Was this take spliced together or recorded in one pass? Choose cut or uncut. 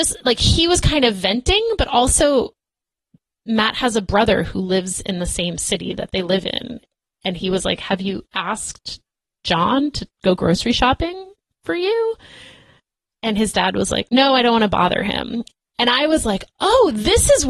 uncut